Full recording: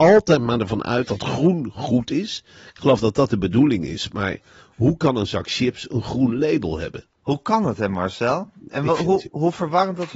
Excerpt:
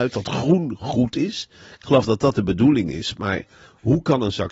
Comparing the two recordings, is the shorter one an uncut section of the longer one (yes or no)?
yes